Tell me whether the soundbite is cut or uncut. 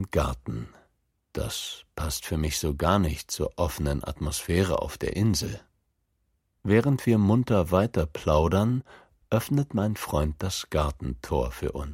cut